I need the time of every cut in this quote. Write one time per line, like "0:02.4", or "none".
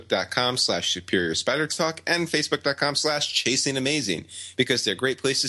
none